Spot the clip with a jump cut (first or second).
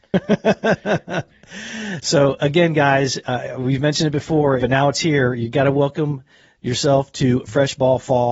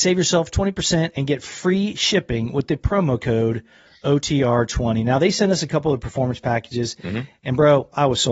first